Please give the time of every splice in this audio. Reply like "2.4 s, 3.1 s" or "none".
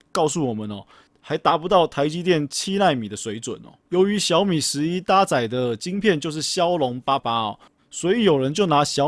1.1 s, 3.8 s, 7.2 s